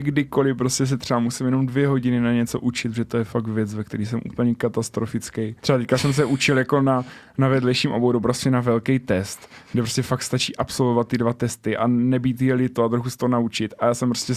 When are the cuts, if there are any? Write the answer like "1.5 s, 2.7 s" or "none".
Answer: 5.6 s

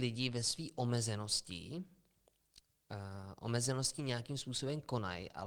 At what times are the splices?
none

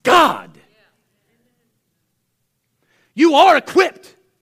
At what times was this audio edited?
none

